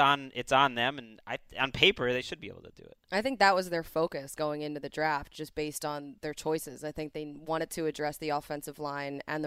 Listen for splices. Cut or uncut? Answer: uncut